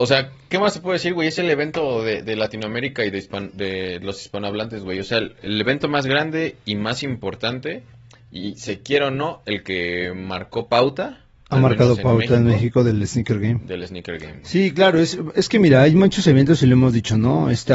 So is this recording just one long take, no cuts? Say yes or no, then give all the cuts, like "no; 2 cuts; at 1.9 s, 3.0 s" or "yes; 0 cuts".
yes; 0 cuts